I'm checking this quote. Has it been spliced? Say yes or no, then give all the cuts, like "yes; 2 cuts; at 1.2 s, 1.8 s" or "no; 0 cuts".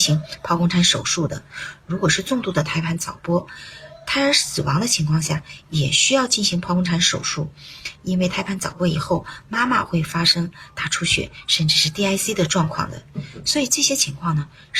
no; 0 cuts